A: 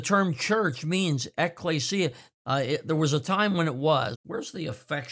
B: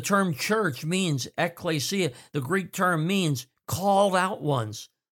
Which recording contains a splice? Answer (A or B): A